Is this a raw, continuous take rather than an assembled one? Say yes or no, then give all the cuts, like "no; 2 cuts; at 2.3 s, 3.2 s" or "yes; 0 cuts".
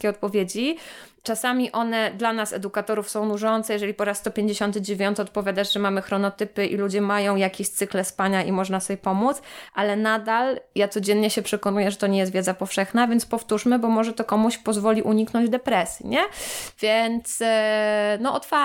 yes; 0 cuts